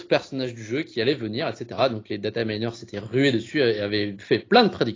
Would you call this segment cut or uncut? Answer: uncut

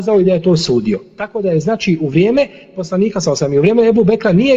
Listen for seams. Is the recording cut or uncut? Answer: uncut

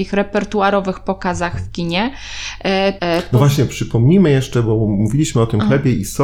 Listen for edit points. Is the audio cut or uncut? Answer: cut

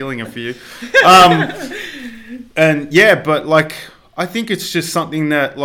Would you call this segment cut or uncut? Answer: uncut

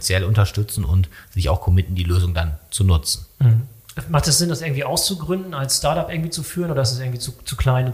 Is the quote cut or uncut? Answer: uncut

